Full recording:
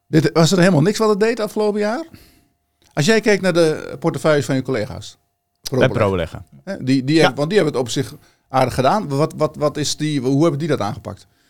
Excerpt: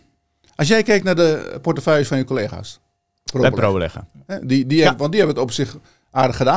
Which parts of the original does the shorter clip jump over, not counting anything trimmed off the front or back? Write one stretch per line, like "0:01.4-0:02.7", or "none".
none